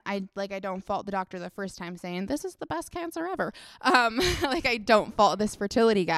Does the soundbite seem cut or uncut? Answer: uncut